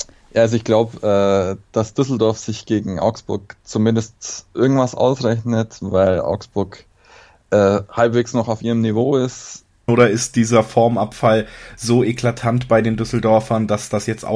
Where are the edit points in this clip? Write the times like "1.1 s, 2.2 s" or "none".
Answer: 9.9 s